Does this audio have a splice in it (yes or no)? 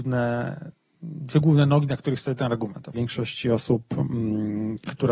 yes